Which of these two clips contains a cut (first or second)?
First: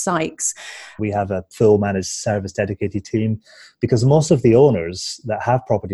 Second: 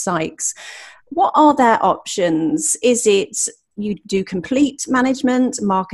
first